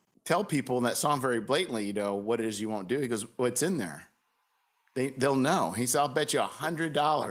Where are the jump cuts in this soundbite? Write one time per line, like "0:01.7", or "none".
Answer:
none